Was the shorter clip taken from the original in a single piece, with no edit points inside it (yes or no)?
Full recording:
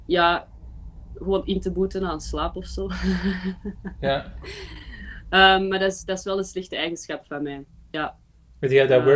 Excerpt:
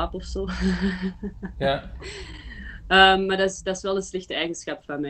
yes